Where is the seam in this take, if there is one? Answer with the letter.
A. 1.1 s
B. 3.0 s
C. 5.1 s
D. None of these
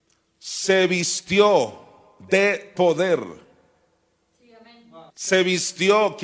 C